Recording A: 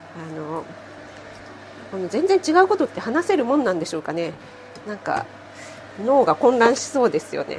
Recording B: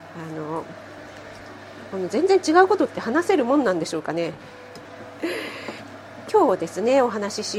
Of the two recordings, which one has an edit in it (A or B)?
B